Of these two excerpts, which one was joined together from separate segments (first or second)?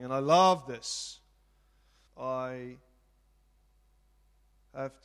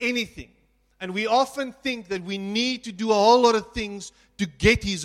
first